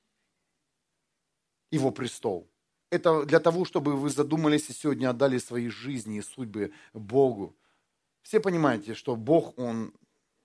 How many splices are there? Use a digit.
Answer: 1